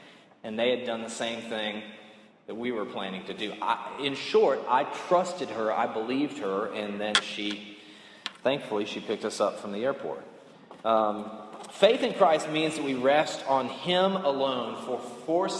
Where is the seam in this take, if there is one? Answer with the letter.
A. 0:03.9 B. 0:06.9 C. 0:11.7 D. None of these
D